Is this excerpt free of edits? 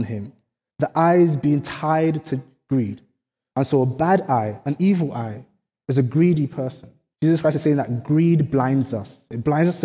no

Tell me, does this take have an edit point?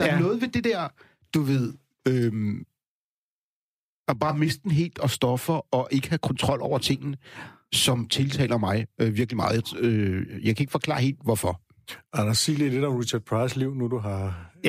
no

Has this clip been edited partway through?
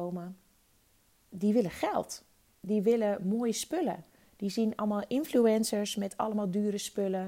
no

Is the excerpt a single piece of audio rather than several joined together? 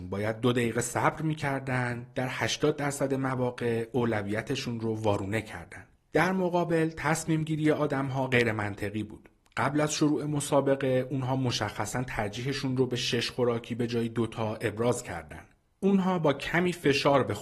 no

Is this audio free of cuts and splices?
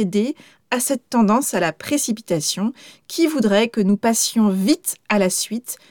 yes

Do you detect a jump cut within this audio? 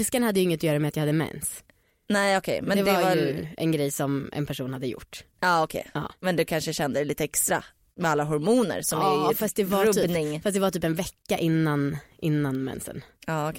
no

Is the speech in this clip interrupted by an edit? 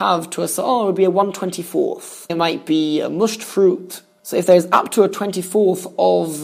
yes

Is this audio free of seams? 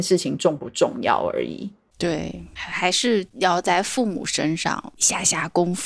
yes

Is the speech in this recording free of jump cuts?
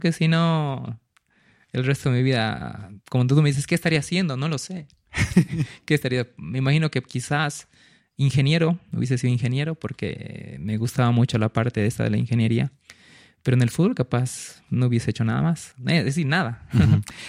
yes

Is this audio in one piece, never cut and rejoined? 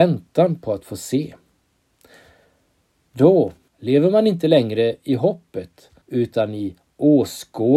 no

